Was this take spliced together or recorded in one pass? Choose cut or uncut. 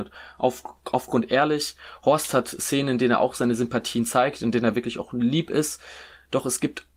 uncut